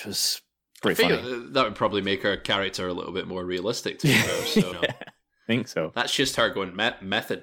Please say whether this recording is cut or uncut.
cut